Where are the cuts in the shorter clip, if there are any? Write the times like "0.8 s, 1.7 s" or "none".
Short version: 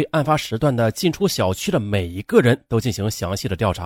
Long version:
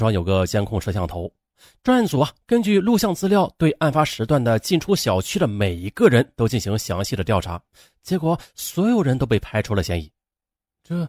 none